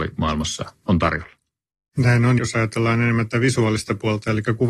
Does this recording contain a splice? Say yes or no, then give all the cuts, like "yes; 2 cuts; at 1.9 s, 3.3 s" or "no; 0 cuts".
yes; 1 cut; at 2.4 s